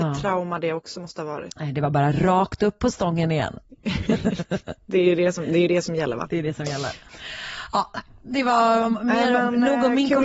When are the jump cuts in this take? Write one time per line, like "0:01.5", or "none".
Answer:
none